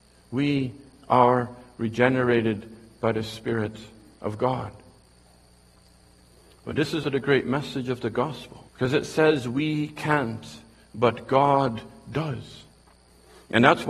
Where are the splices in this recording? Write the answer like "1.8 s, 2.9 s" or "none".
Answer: 7.0 s, 8.7 s